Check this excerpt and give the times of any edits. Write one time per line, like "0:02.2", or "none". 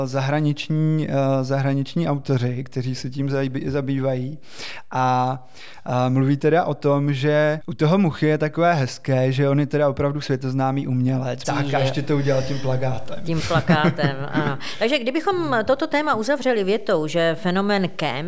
0:11.4